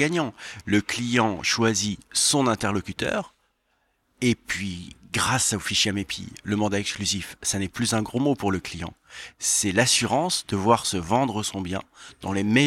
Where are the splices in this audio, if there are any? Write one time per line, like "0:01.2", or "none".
none